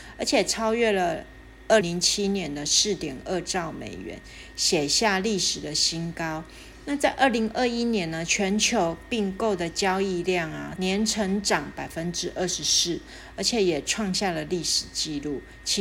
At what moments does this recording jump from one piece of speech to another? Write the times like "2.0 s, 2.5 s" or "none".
1.8 s, 10.8 s